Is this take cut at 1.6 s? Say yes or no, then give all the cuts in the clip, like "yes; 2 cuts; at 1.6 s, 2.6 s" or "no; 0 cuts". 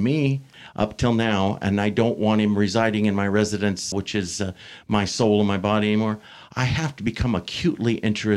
no; 1 cut; at 3.9 s